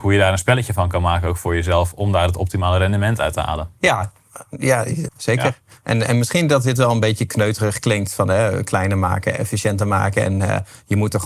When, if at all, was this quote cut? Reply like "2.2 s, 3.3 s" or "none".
3.8 s, 5.1 s